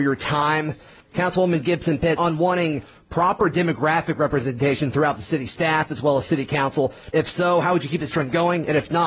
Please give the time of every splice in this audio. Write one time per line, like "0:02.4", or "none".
0:02.2
0:07.1